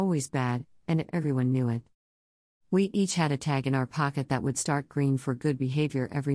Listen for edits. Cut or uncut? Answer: uncut